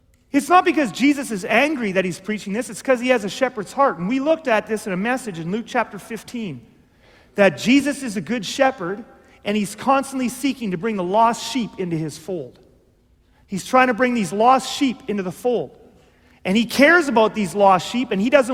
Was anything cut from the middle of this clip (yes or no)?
no